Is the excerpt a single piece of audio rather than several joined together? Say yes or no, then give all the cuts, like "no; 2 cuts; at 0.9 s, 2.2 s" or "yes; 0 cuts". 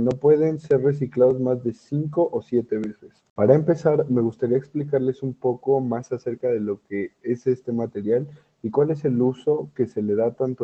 no; 1 cut; at 3.3 s